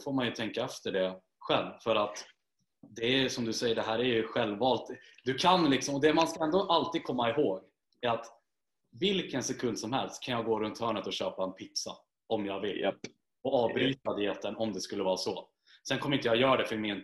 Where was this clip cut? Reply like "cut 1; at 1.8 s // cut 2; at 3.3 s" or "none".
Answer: none